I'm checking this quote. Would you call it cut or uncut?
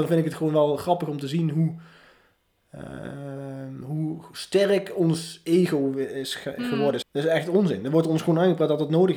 cut